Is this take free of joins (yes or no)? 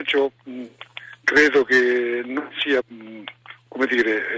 no